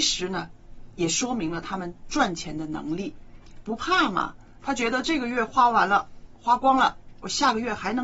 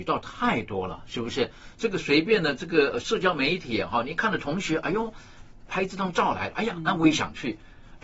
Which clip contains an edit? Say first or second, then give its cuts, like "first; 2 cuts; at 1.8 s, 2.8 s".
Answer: second; 1 cut; at 5.7 s